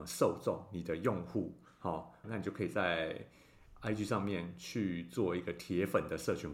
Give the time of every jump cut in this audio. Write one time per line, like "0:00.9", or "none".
0:02.2